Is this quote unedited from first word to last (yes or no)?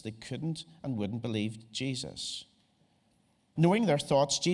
no